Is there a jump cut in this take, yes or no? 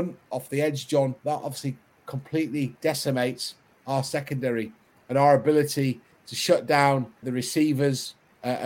yes